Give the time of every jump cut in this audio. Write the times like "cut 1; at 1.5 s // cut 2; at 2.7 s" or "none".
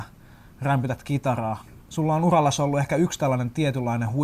cut 1; at 1.8 s